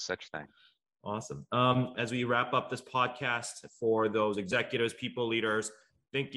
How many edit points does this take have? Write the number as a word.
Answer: one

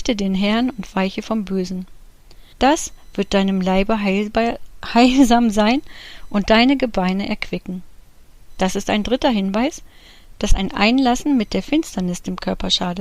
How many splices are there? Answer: one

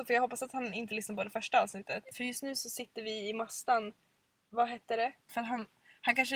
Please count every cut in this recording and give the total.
two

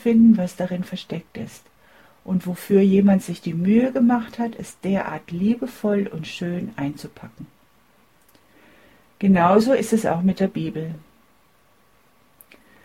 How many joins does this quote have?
zero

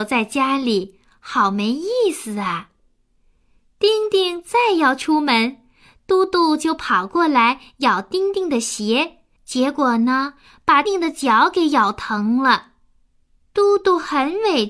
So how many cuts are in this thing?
three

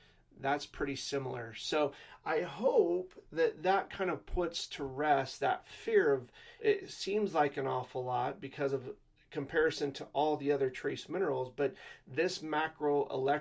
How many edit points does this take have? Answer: one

